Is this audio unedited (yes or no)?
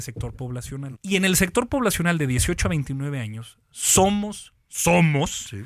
no